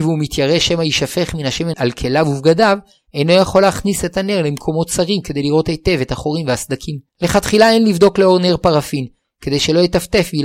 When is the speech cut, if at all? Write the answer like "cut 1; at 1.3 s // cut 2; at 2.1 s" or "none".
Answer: cut 1; at 1.7 s // cut 2; at 7.1 s // cut 3; at 9.2 s